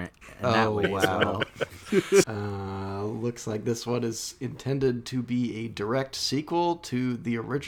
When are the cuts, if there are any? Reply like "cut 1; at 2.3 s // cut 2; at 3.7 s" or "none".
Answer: cut 1; at 2.2 s